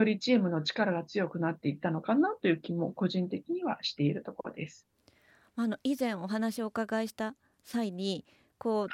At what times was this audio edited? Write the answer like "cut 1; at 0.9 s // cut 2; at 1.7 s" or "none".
none